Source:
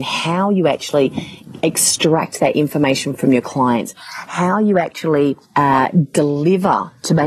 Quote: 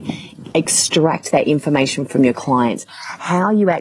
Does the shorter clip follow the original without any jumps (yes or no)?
yes